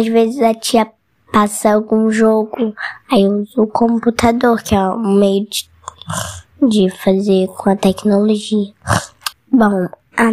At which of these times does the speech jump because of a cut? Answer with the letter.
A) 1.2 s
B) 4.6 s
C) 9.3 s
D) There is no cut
C